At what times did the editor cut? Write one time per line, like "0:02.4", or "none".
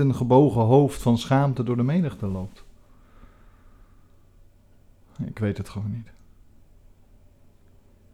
none